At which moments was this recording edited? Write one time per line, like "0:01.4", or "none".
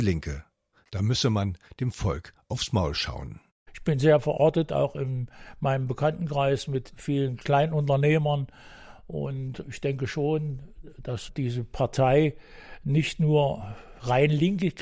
none